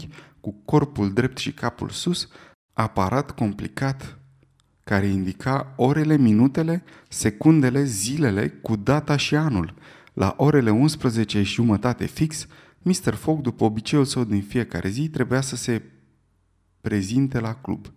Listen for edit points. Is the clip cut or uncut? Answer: cut